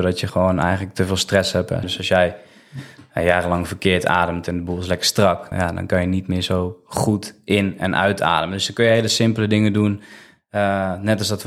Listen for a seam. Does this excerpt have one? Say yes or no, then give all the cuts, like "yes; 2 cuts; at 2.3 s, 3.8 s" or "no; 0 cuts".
yes; 2 cuts; at 1.8 s, 5.5 s